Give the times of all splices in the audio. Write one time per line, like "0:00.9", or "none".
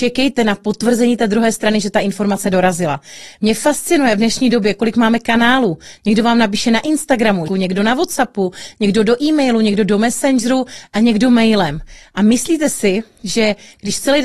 0:07.5